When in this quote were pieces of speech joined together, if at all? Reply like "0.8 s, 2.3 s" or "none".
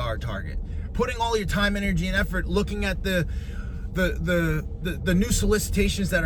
none